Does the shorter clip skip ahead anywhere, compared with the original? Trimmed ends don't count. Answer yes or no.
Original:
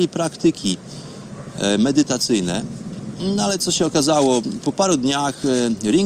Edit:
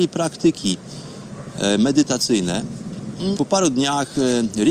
yes